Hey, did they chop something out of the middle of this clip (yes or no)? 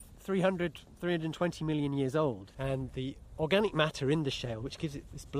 yes